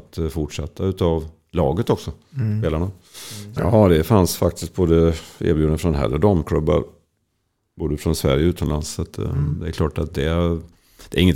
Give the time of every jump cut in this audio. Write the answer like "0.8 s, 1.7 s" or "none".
3.6 s